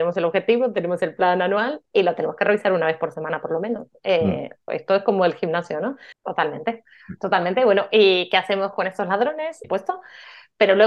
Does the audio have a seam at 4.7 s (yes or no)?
yes